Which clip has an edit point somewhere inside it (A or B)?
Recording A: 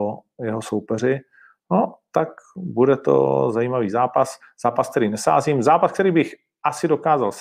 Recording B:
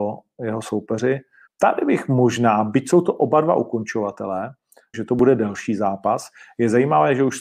B